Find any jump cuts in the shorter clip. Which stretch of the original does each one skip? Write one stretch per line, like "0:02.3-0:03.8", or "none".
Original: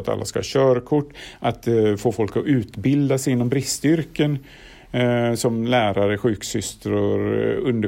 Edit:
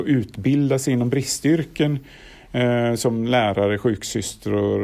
none